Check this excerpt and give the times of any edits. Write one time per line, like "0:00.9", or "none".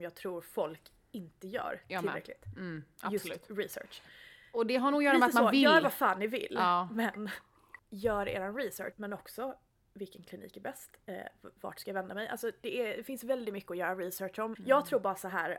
0:07.8
0:08.9
0:14.6

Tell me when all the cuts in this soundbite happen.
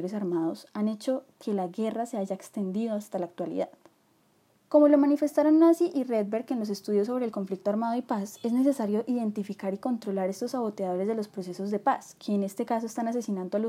0:04.6

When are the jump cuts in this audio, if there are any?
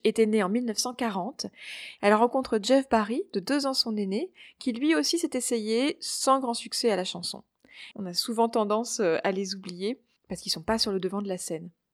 0:02.0
0:07.9

